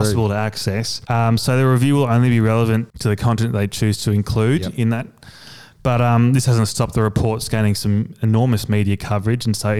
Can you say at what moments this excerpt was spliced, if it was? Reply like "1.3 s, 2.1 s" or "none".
1.1 s, 2.9 s

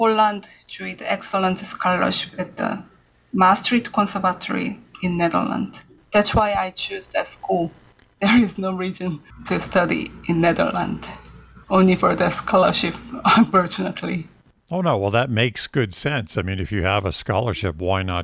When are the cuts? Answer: none

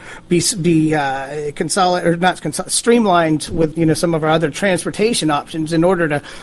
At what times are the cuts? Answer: 3.7 s

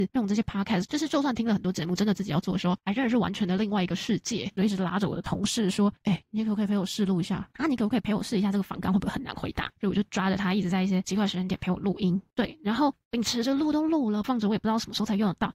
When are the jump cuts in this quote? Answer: 7.5 s, 14.2 s

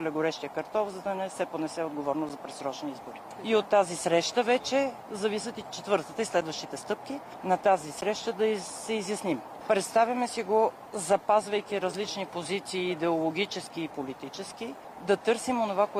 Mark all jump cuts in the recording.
5.6 s, 7.4 s, 9.6 s

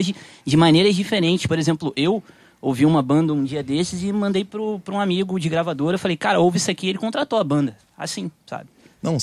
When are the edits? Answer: none

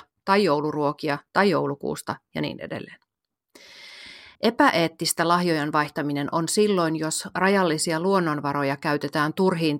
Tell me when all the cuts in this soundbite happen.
4.4 s

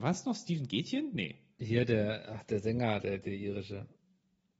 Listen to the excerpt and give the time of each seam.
1.6 s

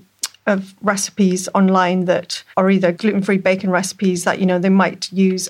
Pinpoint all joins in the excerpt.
2.5 s

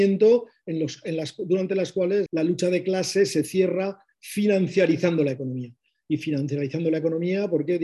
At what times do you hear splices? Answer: 2.3 s

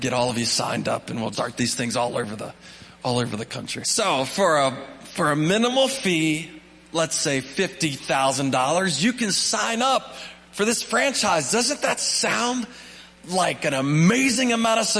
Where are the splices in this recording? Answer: 1.3 s, 3.8 s

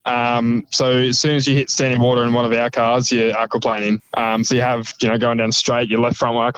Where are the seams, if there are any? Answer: 4.0 s

